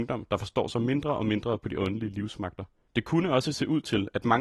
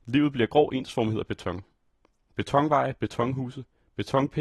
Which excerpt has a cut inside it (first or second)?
first